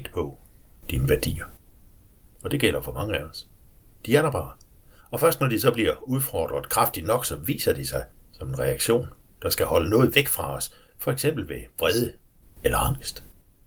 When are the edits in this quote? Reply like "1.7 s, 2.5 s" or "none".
none